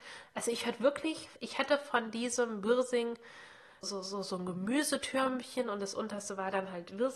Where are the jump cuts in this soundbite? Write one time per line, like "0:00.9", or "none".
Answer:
0:01.4
0:03.8